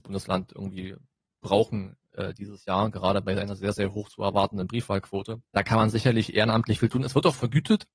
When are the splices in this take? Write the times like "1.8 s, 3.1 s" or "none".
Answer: 5.5 s